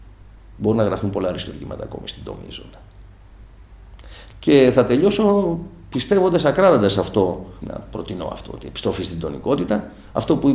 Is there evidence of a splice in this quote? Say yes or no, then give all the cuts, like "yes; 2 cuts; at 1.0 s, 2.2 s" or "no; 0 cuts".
yes; 2 cuts; at 4.3 s, 7.6 s